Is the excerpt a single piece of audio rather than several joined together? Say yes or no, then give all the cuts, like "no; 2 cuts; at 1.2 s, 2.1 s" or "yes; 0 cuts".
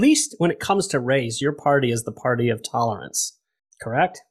yes; 0 cuts